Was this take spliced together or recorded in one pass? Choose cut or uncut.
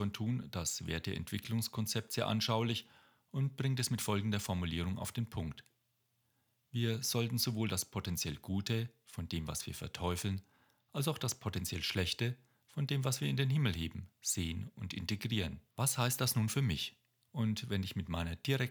cut